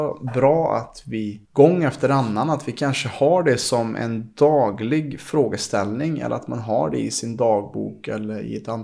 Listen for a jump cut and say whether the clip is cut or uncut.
cut